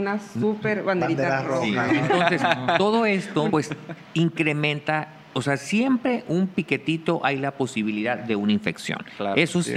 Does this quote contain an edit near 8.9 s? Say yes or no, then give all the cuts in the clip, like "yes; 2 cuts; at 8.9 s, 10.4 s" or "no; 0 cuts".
no; 2 cuts; at 1.9 s, 3.5 s